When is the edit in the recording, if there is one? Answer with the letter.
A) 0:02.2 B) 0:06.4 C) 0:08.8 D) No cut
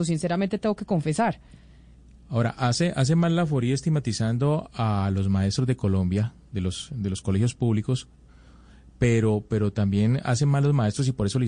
D